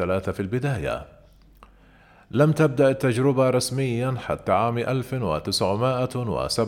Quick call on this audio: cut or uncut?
uncut